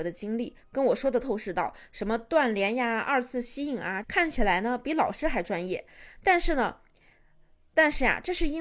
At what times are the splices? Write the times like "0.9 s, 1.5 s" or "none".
1.2 s, 4.0 s